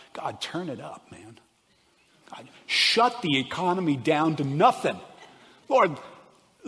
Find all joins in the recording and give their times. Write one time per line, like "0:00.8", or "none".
none